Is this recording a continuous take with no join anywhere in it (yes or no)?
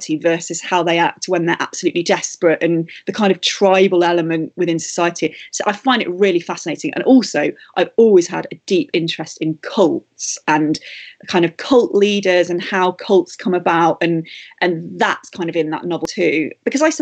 yes